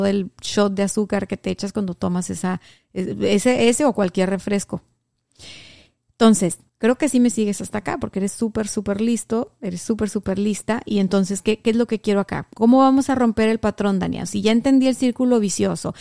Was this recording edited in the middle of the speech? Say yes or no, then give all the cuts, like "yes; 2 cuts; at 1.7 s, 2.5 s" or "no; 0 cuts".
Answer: yes; 1 cut; at 6.7 s